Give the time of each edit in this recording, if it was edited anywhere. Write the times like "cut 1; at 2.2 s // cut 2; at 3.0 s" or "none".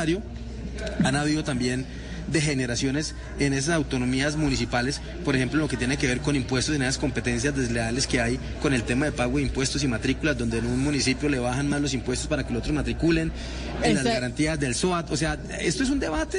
none